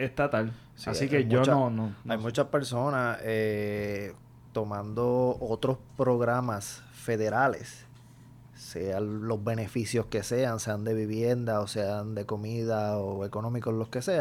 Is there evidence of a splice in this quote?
no; 0 cuts

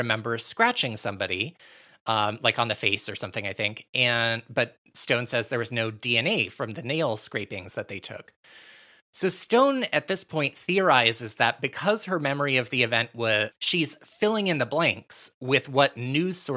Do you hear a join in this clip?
yes; 1 cut; at 13.5 s

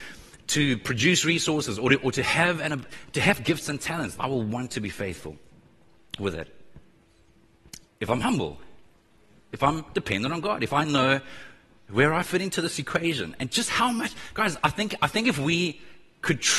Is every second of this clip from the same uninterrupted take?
no; 2 cuts; at 4.2 s, 7.8 s

